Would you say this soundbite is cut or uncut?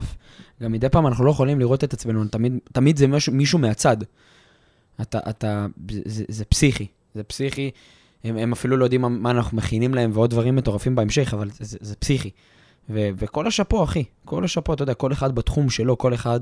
uncut